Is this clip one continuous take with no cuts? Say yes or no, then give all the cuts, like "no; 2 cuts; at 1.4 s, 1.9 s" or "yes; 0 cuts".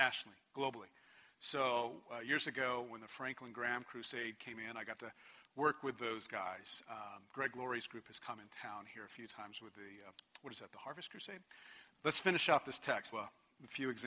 no; 2 cuts; at 11.9 s, 13.1 s